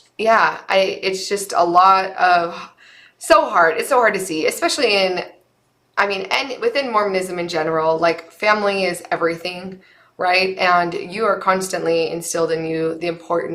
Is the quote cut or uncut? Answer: uncut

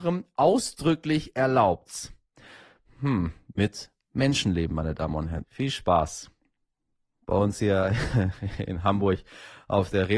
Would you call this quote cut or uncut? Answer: cut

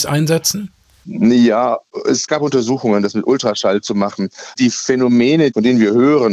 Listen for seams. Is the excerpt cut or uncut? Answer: cut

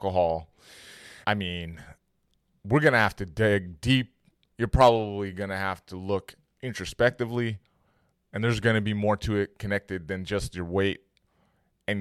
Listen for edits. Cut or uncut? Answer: cut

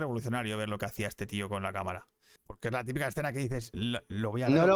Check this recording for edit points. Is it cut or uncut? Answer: cut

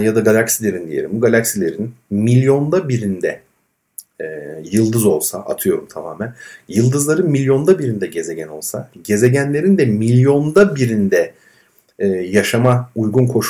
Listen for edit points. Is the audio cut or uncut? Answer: uncut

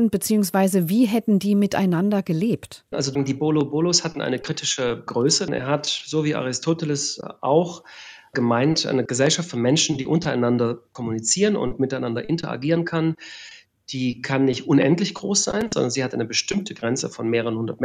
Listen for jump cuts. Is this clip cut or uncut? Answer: cut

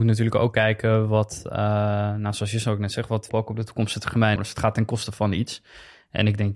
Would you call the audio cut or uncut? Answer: cut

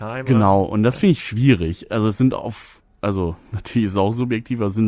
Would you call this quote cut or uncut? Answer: uncut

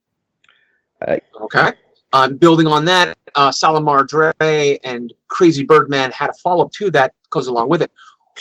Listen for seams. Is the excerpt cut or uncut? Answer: cut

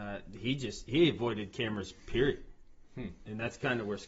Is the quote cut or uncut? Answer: uncut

